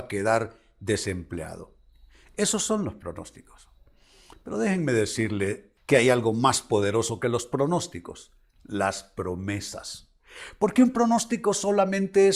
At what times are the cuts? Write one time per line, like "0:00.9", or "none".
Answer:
0:05.8